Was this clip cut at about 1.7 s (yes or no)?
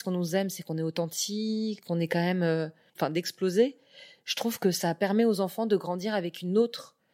no